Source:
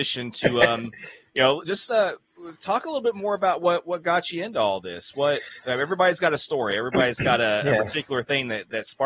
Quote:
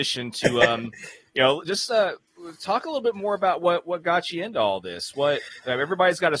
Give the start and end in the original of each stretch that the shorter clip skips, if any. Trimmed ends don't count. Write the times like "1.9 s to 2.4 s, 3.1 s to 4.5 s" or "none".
none